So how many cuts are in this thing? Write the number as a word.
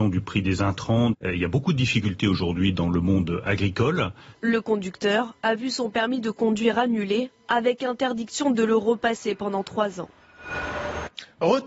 two